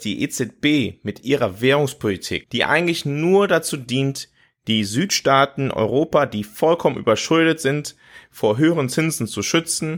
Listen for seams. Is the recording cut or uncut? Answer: uncut